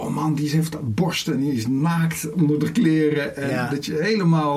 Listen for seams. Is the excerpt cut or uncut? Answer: uncut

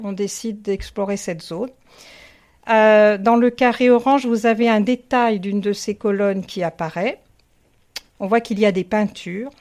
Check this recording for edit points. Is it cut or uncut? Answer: uncut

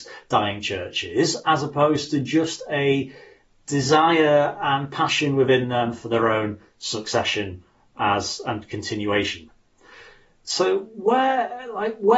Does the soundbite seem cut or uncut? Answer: uncut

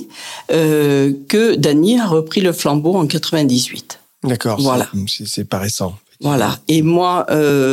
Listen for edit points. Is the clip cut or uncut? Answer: uncut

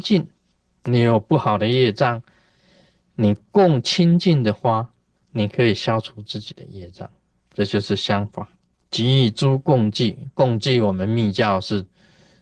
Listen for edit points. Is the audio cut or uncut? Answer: uncut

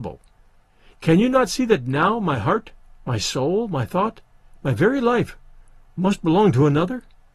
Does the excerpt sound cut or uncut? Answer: uncut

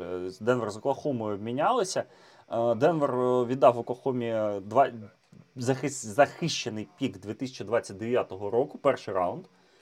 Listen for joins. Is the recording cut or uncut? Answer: uncut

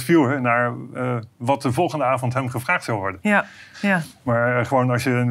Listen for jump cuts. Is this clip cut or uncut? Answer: cut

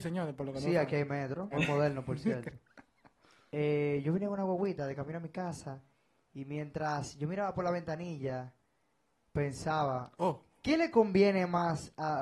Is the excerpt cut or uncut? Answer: cut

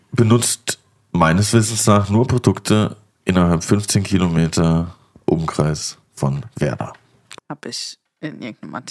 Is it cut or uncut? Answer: cut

